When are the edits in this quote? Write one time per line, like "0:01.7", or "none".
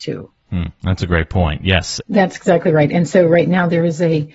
0:02.0